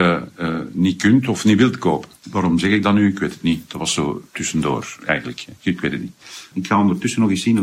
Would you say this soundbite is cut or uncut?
cut